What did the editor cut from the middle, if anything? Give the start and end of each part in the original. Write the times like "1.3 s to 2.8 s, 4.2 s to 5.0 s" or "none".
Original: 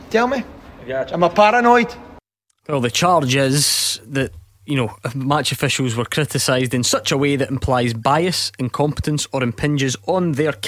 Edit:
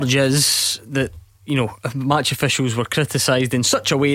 none